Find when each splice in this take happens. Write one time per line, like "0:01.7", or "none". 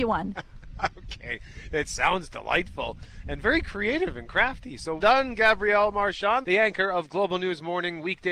0:05.0
0:06.4